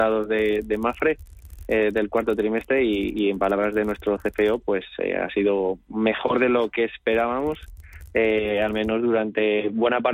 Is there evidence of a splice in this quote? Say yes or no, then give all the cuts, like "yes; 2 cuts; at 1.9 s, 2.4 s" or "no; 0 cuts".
no; 0 cuts